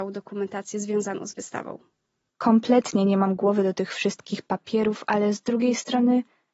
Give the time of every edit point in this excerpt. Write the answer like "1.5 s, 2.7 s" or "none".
2.3 s